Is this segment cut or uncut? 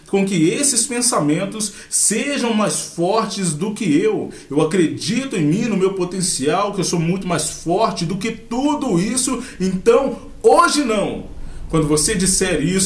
uncut